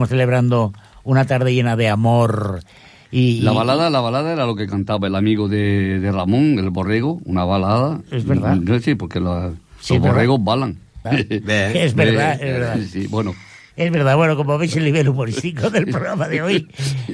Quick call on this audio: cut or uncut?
cut